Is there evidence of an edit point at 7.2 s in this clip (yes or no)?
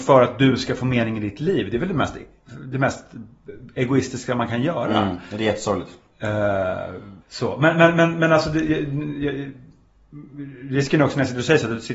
yes